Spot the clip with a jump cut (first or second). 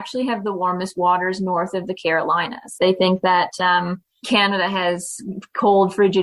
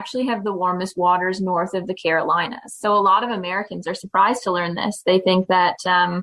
first